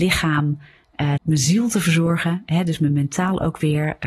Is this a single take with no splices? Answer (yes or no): no